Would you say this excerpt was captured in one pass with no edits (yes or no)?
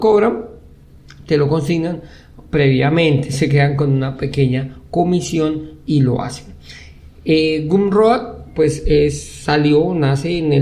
yes